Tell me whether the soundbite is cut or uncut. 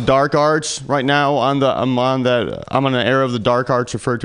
uncut